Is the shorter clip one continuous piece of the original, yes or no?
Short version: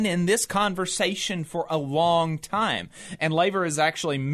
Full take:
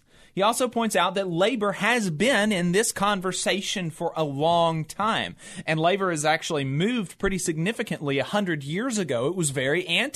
yes